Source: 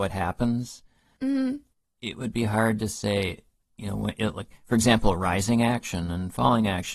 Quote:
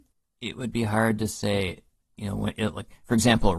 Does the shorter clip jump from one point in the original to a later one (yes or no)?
no